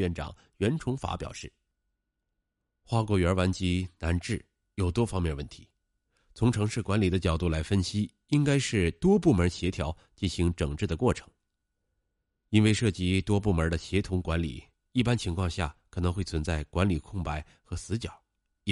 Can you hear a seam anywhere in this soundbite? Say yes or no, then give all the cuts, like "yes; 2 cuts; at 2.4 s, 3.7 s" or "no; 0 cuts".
no; 0 cuts